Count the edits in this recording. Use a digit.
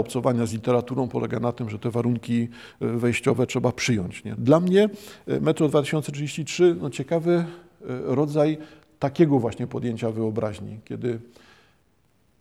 1